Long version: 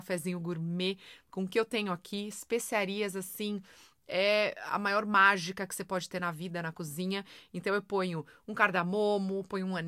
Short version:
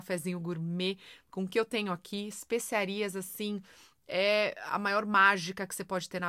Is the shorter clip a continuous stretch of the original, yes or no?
yes